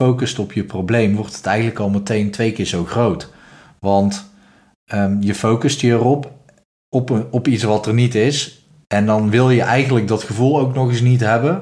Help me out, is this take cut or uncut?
uncut